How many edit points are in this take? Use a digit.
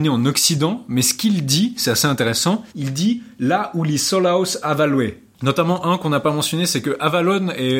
2